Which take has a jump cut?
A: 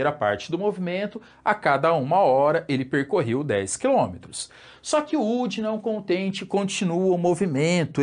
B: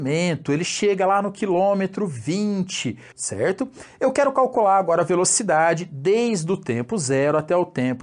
B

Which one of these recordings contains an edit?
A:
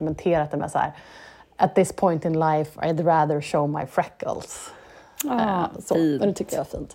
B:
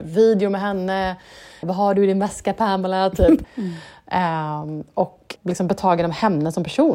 B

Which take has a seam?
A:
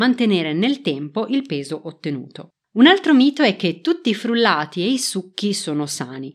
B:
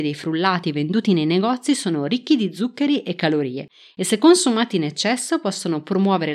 A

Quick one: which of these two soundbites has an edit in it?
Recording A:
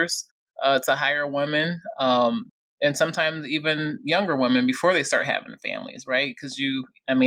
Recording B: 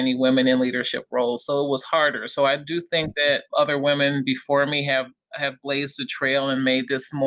B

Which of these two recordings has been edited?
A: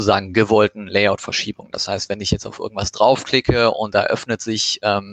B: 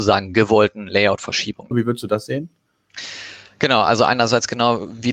B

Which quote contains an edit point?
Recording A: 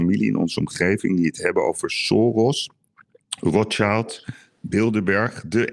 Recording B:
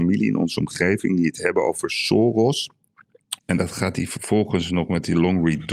B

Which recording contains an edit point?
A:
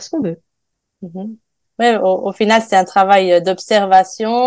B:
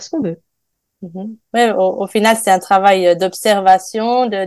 B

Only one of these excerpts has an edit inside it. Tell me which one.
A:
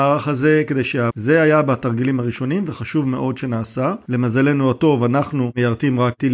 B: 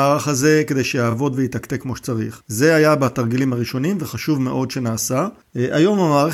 A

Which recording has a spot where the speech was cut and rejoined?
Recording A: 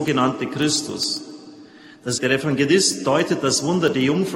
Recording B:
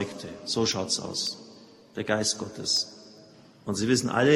A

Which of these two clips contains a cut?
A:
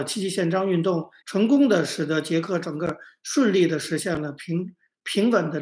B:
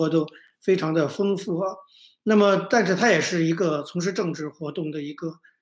A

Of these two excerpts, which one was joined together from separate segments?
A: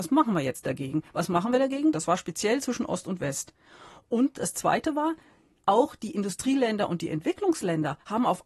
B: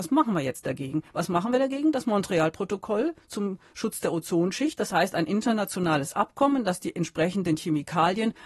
A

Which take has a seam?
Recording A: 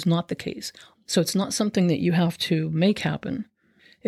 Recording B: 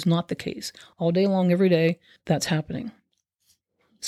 A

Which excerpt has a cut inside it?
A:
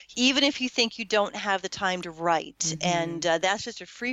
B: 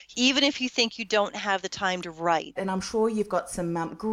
B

